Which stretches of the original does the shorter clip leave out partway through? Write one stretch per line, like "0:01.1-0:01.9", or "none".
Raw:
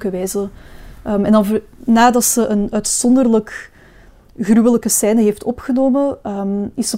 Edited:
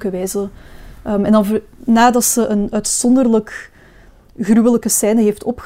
none